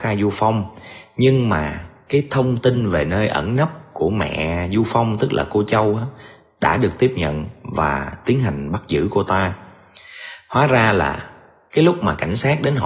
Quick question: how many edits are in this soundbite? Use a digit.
0